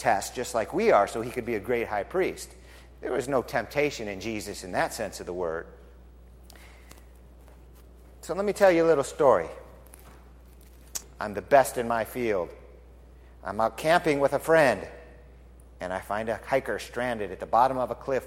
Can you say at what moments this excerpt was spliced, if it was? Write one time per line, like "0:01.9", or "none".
0:11.0

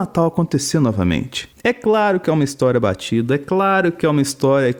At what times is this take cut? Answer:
none

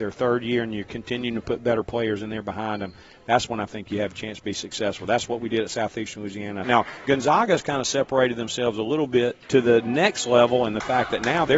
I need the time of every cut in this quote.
0:06.6
0:09.4

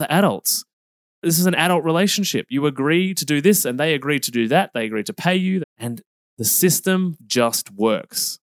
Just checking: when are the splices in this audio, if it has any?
0:05.6
0:07.2

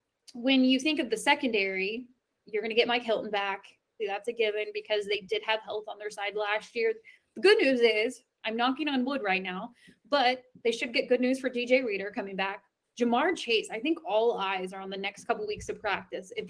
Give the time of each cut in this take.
0:02.3
0:04.0

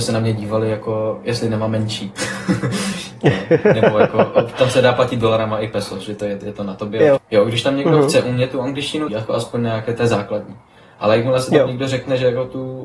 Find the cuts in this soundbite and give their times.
0:07.2
0:09.1

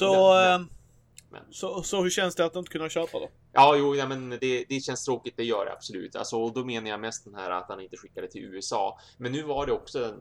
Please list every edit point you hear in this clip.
none

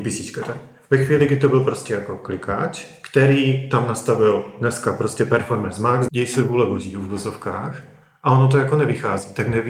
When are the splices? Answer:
0:06.1

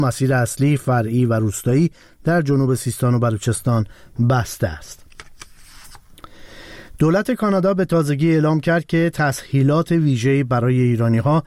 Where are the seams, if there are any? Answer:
none

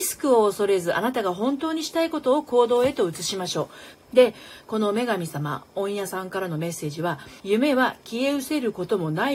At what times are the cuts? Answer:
0:03.9
0:07.4

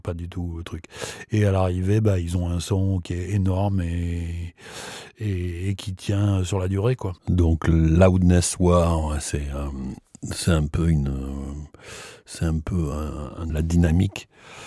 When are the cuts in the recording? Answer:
0:07.2
0:13.5

